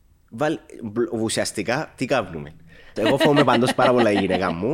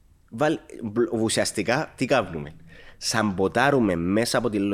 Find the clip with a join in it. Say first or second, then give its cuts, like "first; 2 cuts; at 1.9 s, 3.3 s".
first; 1 cut; at 3.0 s